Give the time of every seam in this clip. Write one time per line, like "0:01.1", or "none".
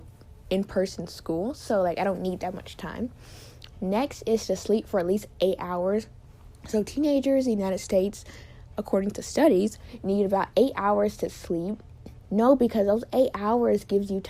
0:12.2